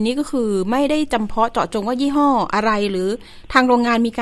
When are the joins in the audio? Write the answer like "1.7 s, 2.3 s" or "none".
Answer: none